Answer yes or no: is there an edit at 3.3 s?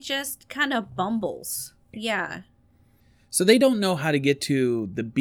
no